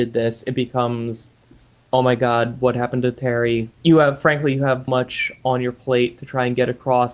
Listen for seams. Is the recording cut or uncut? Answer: cut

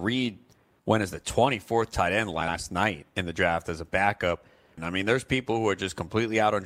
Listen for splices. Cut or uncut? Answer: cut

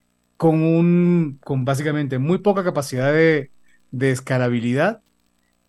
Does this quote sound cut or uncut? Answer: uncut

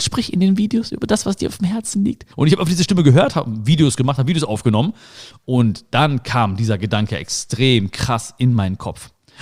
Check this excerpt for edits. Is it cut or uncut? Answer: cut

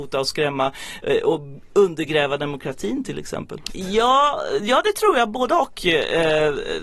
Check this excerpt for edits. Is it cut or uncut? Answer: cut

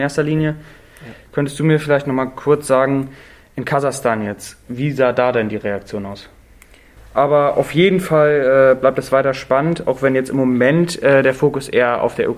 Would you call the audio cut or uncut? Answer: cut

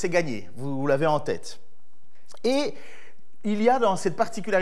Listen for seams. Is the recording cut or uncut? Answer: uncut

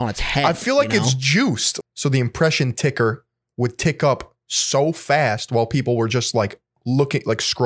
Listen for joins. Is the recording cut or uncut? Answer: cut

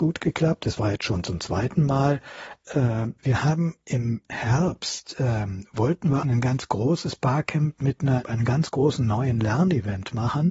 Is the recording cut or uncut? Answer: cut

